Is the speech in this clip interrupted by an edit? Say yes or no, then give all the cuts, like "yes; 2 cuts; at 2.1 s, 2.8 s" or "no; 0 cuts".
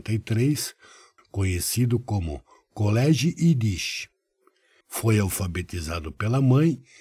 yes; 2 cuts; at 1.2 s, 4.8 s